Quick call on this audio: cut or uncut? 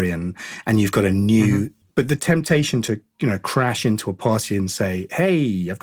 cut